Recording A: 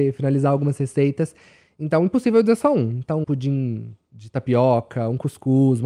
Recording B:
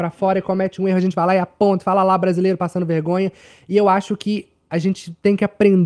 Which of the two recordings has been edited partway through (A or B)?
A